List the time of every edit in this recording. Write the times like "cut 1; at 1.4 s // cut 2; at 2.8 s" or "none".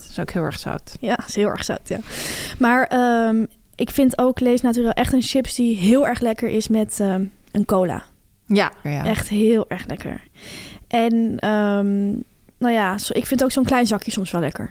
cut 1; at 8.8 s